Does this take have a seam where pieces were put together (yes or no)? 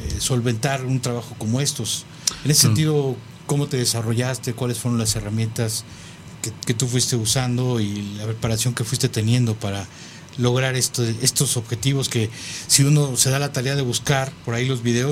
no